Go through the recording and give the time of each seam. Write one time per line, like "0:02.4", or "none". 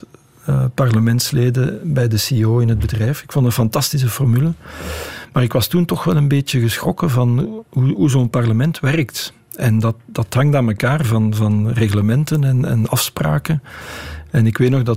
none